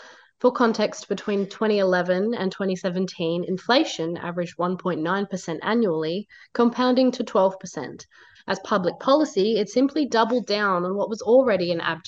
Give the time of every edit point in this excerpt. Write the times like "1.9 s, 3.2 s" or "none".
8.4 s